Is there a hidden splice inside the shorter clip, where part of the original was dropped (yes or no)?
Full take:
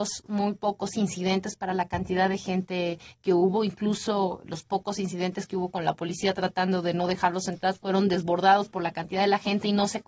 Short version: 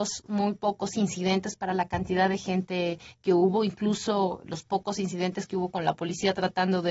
no